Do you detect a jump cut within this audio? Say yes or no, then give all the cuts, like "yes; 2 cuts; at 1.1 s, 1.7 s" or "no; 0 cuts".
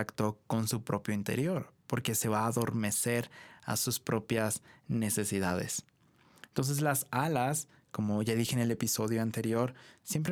no; 0 cuts